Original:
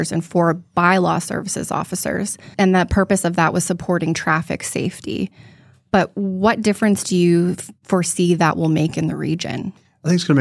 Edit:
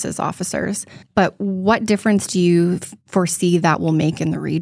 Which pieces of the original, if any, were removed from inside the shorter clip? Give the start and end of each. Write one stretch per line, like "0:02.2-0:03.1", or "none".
0:02.5-0:05.8